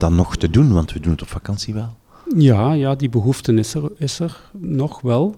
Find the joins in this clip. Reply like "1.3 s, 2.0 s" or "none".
none